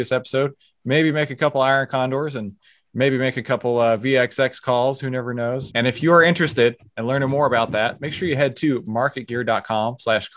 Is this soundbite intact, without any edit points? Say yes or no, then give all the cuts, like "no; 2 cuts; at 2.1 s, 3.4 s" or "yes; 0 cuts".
no; 1 cut; at 5.7 s